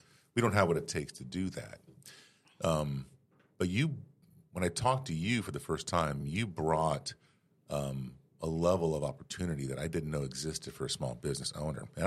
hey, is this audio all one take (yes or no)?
yes